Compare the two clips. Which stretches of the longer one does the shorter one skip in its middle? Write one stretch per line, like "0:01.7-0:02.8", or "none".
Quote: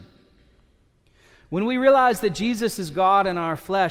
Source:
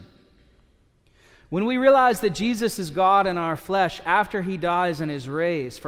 none